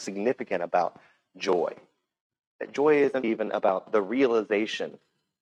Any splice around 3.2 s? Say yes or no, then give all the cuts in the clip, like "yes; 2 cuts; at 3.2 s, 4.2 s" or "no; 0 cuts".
yes; 1 cut; at 3.2 s